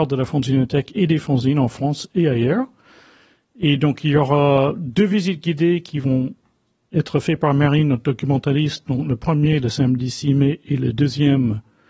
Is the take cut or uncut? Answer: uncut